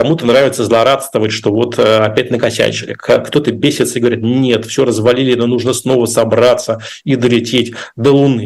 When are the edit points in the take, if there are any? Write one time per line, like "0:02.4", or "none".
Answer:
none